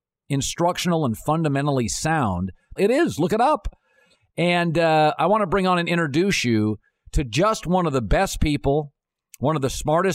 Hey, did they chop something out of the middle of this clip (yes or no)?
yes